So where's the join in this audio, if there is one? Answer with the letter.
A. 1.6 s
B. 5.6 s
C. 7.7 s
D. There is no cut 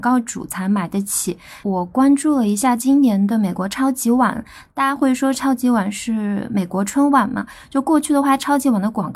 A